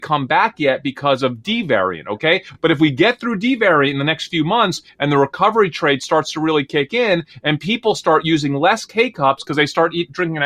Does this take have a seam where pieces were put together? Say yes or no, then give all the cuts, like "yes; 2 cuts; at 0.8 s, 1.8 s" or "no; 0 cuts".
no; 0 cuts